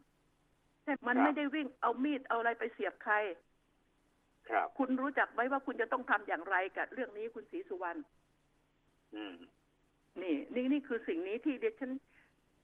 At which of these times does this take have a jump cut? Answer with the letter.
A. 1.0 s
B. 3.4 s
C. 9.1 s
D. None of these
A